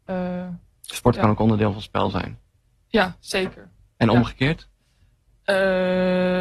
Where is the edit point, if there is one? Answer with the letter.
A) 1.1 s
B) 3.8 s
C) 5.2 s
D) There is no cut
D